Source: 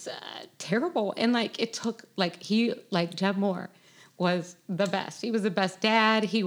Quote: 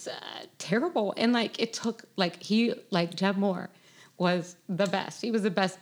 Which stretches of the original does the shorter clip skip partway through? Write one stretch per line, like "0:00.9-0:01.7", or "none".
none